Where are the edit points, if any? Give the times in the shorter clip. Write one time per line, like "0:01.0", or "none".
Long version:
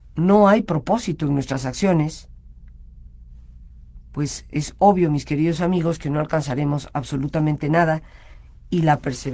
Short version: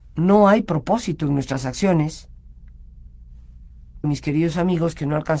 0:04.0